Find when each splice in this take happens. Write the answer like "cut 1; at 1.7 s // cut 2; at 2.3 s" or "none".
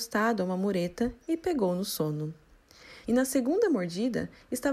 cut 1; at 3.0 s